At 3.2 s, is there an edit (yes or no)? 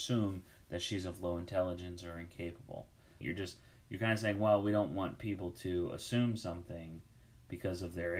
yes